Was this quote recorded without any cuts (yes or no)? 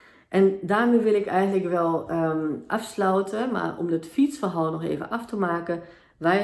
yes